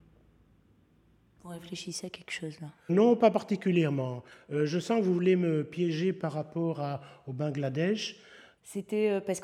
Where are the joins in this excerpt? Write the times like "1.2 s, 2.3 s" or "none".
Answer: 2.9 s